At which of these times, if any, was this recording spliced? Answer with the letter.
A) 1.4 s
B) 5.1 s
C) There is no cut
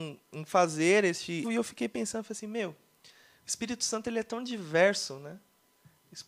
A